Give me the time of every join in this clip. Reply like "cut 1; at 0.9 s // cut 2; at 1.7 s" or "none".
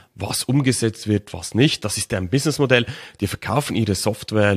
none